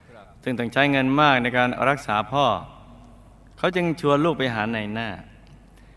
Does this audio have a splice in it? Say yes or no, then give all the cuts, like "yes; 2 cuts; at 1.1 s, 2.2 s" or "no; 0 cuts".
no; 0 cuts